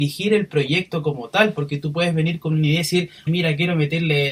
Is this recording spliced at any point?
yes; 1 cut; at 3.3 s

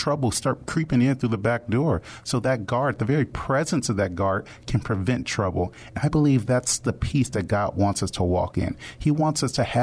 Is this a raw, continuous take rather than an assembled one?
yes; 0 cuts

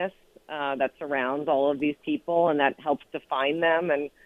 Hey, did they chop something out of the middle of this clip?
no; 0 cuts

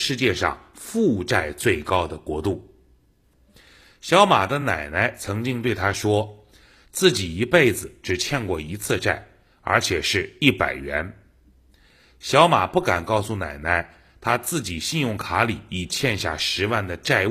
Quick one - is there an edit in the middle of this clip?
no; 0 cuts

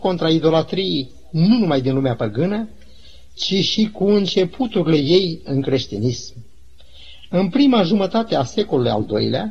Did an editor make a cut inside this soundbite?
no; 0 cuts

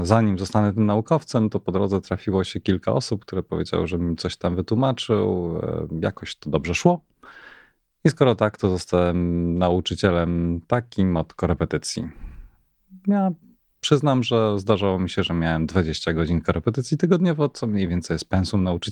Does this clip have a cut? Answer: no; 0 cuts

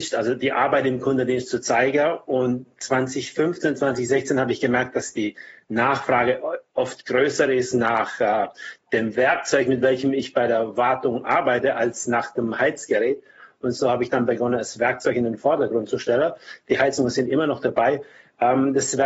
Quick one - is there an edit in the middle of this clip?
no; 0 cuts

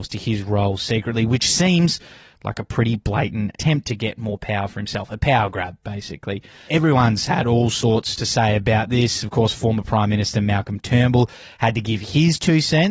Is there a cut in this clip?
no; 0 cuts

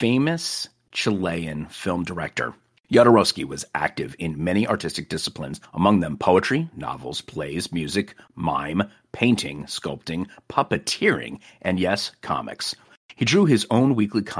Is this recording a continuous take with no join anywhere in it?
no; 1 cut; at 2.8 s

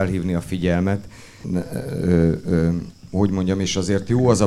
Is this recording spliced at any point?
yes; 2 cuts; at 1.4 s, 3.1 s

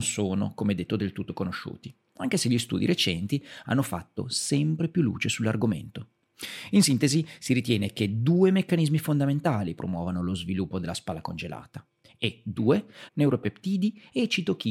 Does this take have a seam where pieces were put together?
yes; 2 cuts; at 12.0 s, 13.1 s

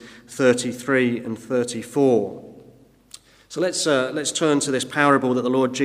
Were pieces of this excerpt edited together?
no; 0 cuts

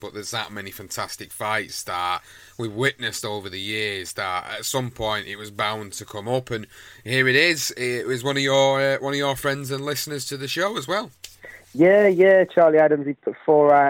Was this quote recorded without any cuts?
yes; 0 cuts

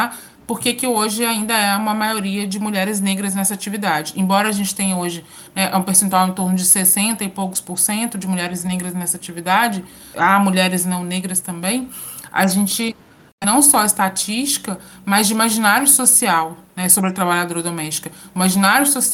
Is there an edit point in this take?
yes; 1 cut; at 13.4 s

